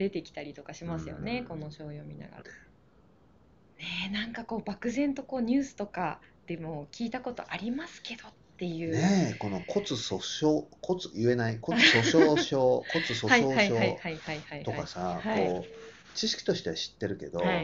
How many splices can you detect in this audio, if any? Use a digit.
2